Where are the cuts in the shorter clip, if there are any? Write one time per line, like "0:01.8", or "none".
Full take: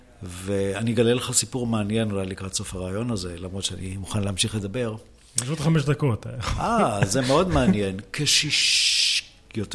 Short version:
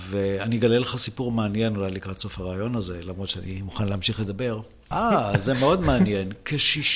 0:04.9

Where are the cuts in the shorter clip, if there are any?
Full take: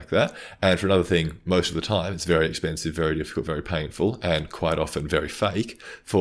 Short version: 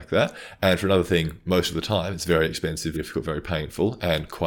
0:02.9

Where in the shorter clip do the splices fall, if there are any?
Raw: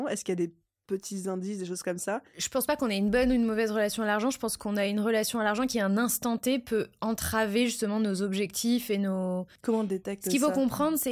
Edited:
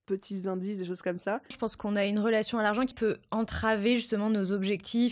0:01.5
0:02.9

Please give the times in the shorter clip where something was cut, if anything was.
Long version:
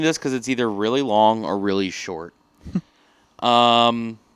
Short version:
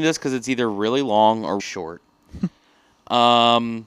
0:01.6

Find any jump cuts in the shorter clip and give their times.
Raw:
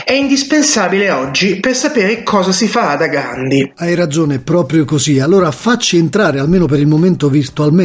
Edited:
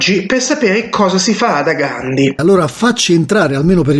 0:02.4

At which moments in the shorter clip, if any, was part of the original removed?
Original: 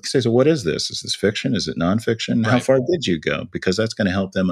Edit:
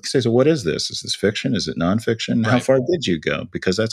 none

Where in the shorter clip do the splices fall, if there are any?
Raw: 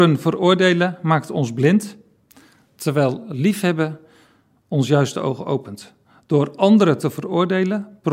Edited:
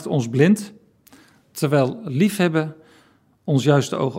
none

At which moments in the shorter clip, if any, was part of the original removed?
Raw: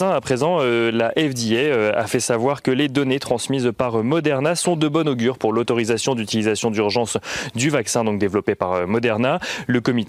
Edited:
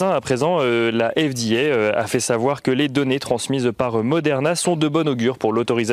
none

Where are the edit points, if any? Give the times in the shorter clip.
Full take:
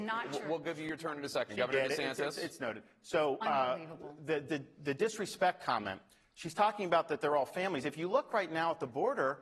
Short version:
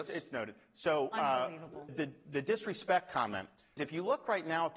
0:01.9
0:03.8

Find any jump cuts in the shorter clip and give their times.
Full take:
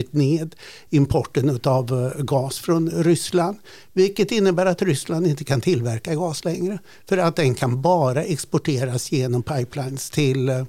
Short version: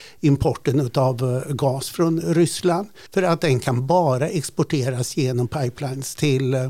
0:03.1

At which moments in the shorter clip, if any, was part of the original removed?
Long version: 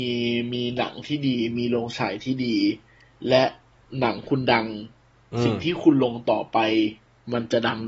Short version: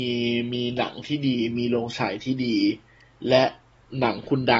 none

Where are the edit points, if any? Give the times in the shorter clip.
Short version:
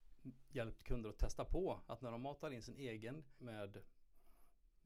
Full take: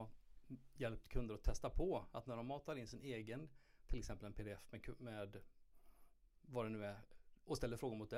0:03.4

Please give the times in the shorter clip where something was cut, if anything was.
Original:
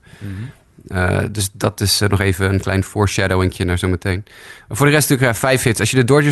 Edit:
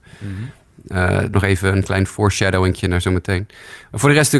0:01.3

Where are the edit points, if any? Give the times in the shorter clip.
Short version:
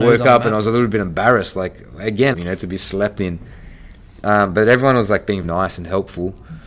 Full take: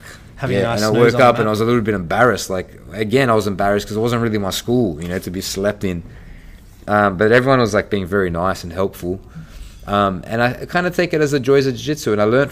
0:02.3
0:05.4

